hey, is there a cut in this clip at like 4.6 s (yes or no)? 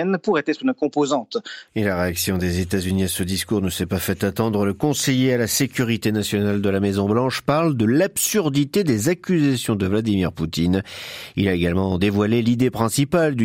no